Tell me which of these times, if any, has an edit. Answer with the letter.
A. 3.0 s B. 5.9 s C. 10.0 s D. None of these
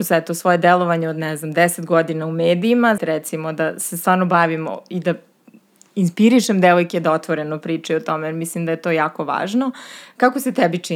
A